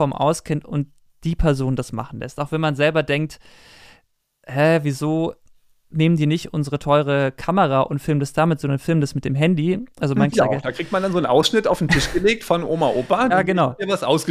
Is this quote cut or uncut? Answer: cut